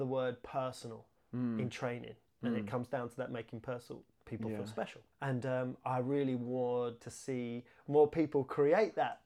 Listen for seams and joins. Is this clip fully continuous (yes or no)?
no